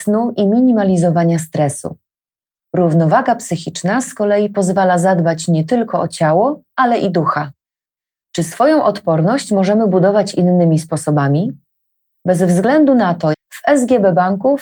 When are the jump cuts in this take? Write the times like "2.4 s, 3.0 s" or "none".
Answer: 13.3 s

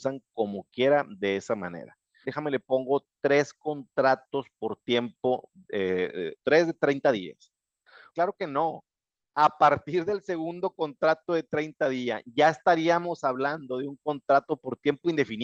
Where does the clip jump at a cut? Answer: 2.2 s, 6.4 s, 8.1 s

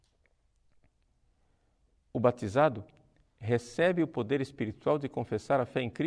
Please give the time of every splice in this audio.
none

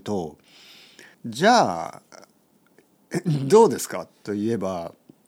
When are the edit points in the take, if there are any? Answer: 1.1 s

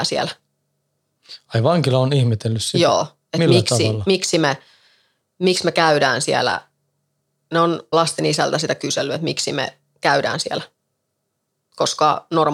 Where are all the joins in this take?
7.9 s

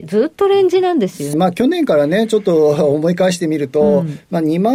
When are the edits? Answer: 1.3 s

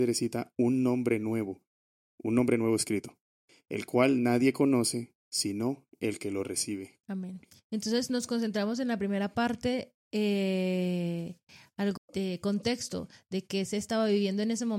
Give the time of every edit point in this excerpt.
7.0 s, 12.0 s

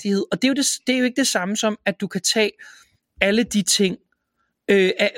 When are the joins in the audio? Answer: none

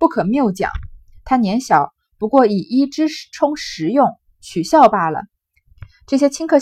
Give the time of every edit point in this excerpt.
5.6 s

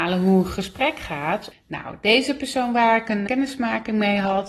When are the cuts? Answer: 1.5 s, 3.3 s

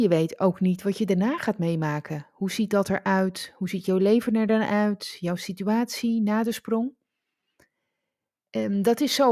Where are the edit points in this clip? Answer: none

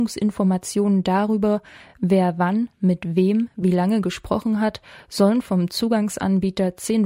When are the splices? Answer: none

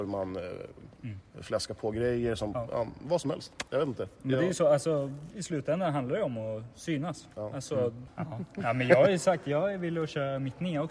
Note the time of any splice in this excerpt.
5.3 s, 8.1 s

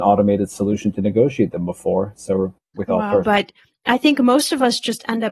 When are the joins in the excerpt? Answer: 3.2 s

